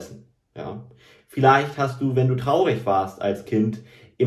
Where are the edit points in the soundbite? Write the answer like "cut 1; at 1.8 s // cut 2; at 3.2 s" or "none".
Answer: none